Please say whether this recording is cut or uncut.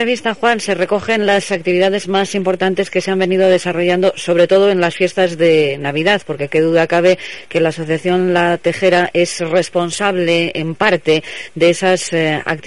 uncut